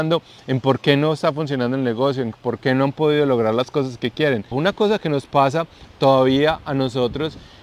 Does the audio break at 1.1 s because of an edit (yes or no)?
no